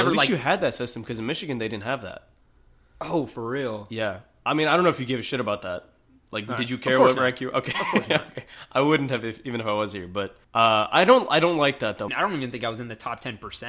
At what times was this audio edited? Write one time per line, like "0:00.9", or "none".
0:10.4
0:12.1